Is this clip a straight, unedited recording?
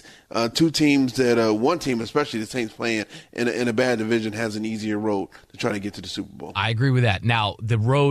yes; 0 cuts

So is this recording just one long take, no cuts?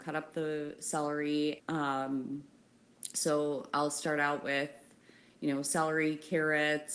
no; 1 cut; at 1.6 s

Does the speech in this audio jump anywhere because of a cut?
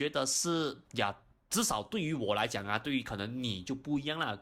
no; 0 cuts

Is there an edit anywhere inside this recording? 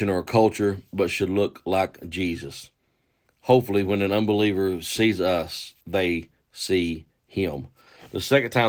no; 0 cuts

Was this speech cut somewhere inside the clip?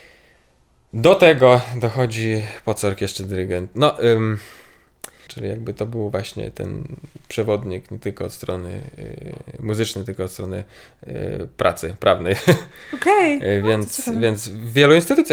yes; 1 cut; at 5.3 s

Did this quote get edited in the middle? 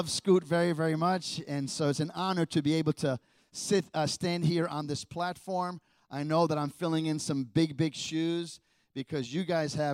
no; 0 cuts

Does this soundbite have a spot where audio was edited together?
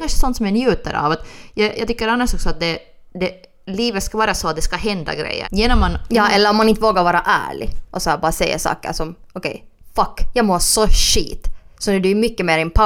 yes; 1 cut; at 5.4 s

